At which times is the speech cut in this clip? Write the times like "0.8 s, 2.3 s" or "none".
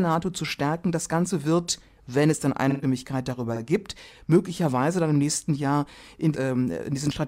6.3 s